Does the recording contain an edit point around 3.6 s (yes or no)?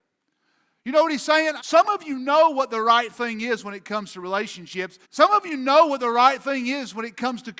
no